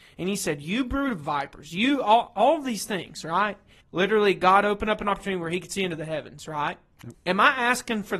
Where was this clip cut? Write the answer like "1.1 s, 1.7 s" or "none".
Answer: 3.8 s, 7.1 s